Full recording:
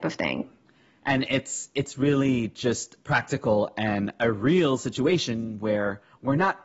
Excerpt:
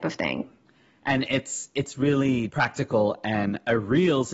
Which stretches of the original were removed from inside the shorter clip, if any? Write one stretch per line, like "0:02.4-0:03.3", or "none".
0:02.5-0:03.0

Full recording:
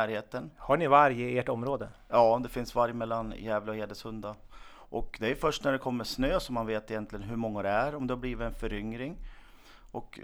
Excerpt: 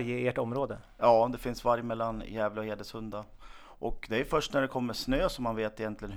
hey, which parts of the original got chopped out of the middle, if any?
none

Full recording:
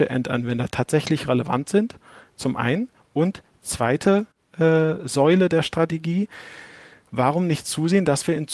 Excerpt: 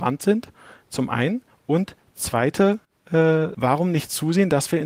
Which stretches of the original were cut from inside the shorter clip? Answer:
0:05.0-0:07.1

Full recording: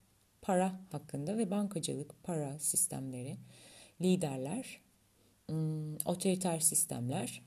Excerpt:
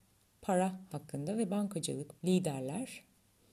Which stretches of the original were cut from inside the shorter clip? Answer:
0:02.2-0:04.0

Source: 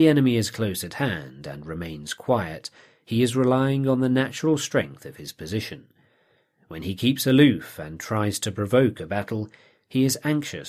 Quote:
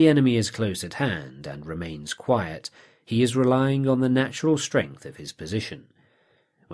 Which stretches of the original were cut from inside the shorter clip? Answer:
none

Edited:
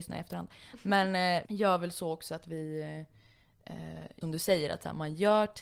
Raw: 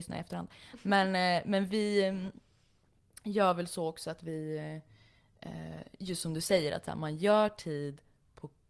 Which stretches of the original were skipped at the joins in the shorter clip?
0:01.4-0:03.2
0:06.0-0:06.2

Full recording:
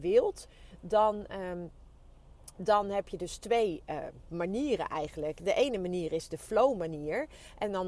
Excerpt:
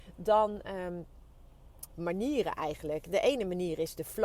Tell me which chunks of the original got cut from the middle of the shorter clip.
0:02.5-0:04.2

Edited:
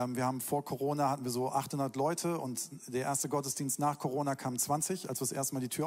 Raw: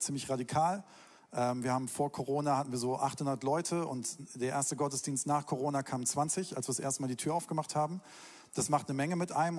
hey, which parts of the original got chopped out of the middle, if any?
none

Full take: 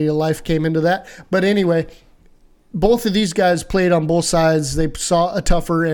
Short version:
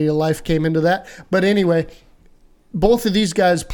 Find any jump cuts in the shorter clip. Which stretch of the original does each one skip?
none

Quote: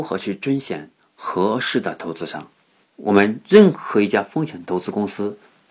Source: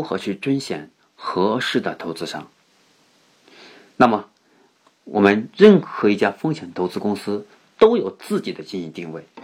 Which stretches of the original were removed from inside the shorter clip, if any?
0:02.8-0:04.9

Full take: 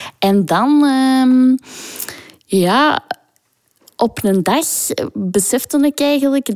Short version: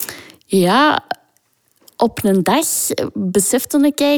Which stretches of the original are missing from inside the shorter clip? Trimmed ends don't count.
none

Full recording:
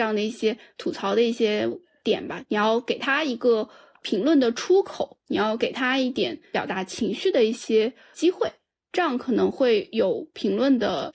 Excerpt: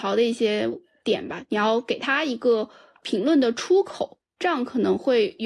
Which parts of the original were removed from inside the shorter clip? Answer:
0:05.2-0:08.8

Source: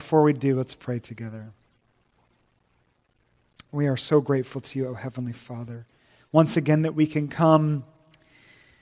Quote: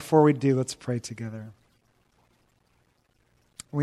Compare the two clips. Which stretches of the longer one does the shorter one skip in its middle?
none

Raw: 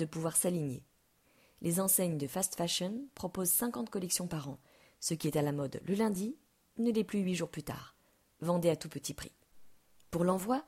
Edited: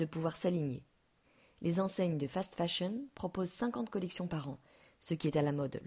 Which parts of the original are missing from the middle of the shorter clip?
none

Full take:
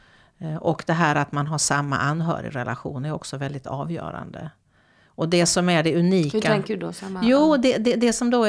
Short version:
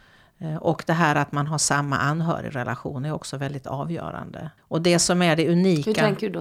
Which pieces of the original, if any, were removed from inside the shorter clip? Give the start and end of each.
0:04.6-0:05.0

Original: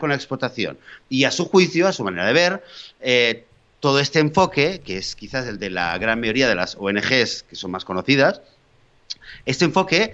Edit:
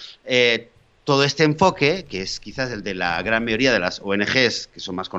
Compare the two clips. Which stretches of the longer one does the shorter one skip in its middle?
none

